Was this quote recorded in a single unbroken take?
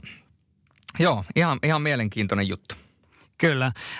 yes; 0 cuts

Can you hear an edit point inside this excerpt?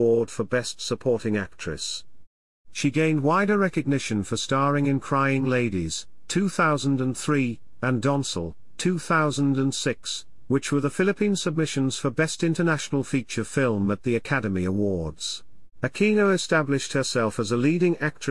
yes; 1 cut; at 15.7 s

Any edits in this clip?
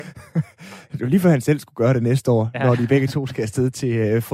no; 0 cuts

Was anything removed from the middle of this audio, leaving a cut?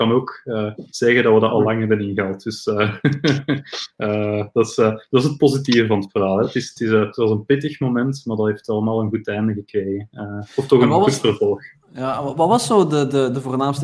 no; 0 cuts

